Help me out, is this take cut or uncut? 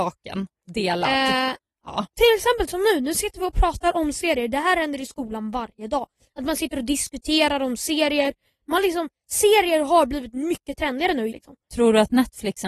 cut